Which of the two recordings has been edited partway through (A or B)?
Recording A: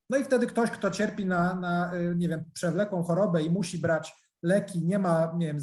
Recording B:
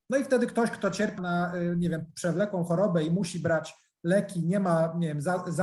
B